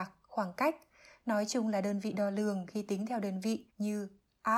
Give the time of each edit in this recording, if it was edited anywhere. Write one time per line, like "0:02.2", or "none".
0:03.7